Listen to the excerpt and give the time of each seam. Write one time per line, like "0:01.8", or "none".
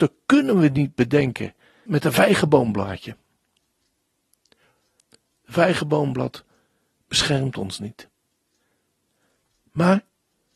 0:01.9
0:05.0